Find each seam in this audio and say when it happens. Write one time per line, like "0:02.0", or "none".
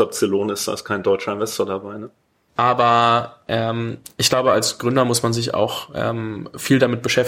0:02.5